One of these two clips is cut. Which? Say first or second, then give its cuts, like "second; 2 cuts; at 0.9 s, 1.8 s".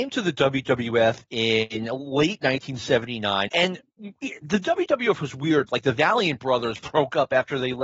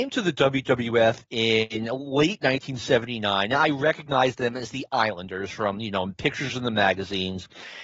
first; 2 cuts; at 3.5 s, 5.7 s